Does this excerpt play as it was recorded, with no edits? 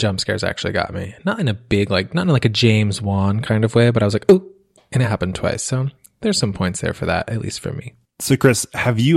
yes; 0 cuts

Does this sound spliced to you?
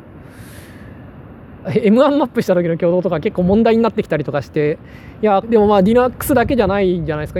yes; 2 cuts; at 1.6 s, 5.4 s

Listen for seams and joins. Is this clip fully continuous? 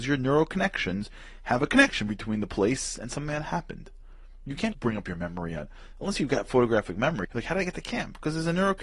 no; 2 cuts; at 4.7 s, 7.2 s

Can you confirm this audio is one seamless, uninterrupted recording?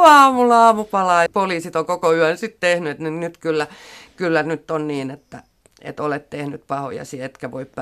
no; 1 cut; at 1.3 s

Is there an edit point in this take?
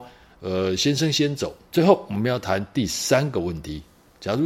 yes; 1 cut; at 1.7 s

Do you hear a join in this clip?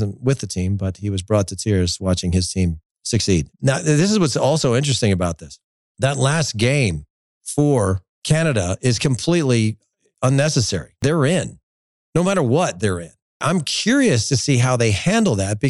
yes; 1 cut; at 3.5 s

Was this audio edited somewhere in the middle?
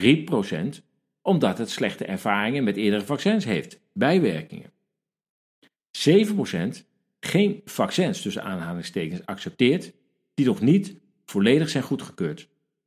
no; 0 cuts

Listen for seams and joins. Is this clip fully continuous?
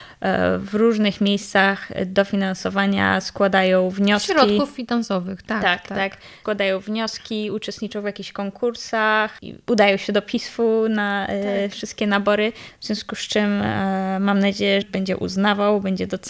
no; 2 cuts; at 12.7 s, 14.8 s

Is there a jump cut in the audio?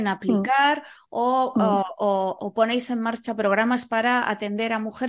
no; 0 cuts

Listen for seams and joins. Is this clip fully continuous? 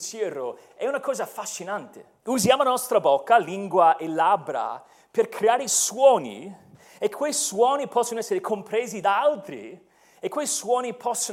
no; 1 cut; at 2.2 s

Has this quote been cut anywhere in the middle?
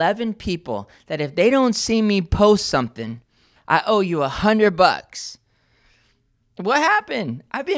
yes; 1 cut; at 3.6 s

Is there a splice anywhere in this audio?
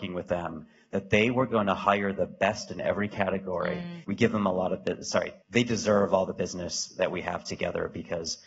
yes; 2 cuts; at 4.0 s, 5.4 s

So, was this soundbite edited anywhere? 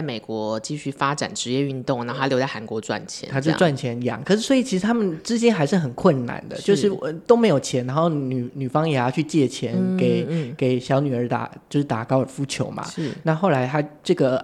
no; 0 cuts

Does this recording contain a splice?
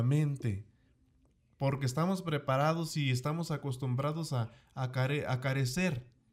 no; 0 cuts

